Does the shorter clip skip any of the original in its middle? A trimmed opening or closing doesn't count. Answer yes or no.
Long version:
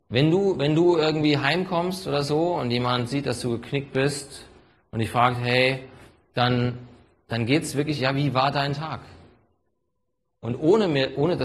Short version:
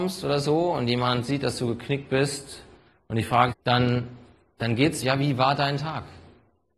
yes